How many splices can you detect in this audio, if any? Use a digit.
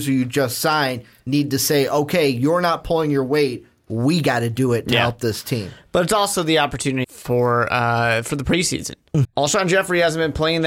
2